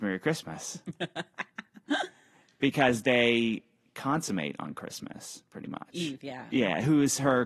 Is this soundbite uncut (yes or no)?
no